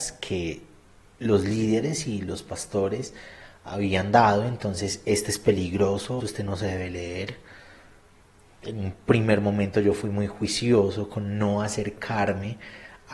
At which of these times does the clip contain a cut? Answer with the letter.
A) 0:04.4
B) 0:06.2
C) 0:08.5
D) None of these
B